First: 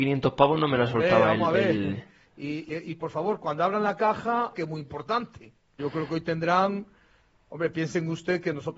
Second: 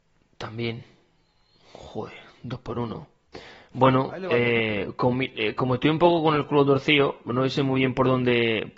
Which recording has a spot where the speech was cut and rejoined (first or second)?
first